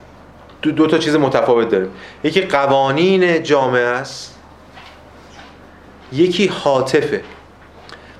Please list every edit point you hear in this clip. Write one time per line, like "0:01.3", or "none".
none